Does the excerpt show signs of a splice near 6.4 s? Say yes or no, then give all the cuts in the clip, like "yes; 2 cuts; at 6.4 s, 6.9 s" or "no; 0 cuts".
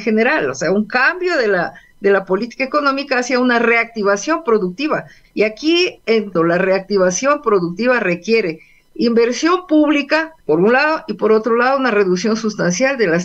yes; 2 cuts; at 6.4 s, 10.4 s